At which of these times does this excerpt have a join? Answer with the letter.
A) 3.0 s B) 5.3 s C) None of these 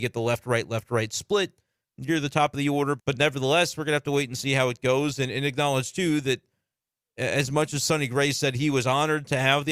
A